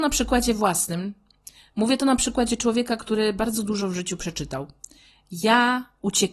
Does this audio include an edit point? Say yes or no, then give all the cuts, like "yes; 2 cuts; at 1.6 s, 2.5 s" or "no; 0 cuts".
no; 0 cuts